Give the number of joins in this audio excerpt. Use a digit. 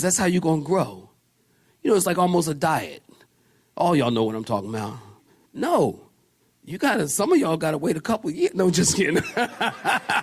1